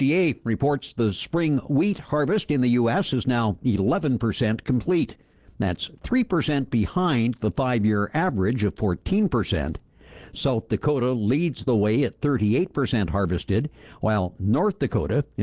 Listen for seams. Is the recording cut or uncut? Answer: uncut